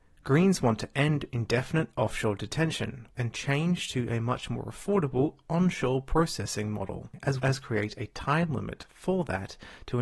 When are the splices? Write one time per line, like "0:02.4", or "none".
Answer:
0:03.1
0:07.4